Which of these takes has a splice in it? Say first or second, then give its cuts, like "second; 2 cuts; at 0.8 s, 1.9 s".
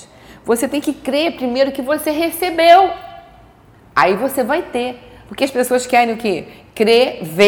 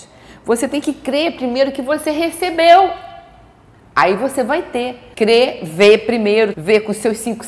second; 2 cuts; at 5.1 s, 6.5 s